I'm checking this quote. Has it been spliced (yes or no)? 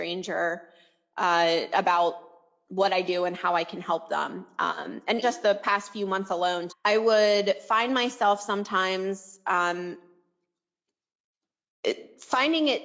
yes